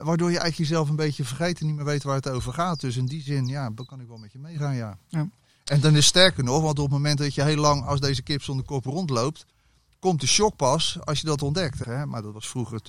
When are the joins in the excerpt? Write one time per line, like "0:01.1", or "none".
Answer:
0:11.8